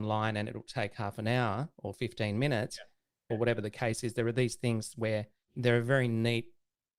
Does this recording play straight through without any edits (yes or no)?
no